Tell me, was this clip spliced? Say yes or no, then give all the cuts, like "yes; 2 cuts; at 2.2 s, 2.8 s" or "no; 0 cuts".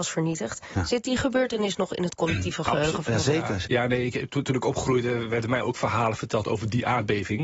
yes; 1 cut; at 3.6 s